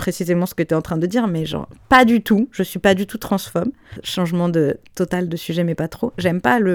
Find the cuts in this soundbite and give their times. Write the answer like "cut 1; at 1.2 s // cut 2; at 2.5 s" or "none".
none